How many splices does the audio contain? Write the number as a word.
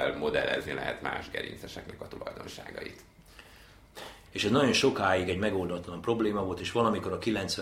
one